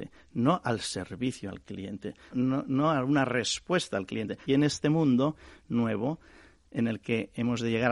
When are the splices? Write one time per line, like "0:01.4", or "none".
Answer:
0:02.3
0:04.4